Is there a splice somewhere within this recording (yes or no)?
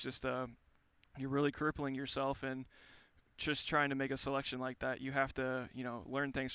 no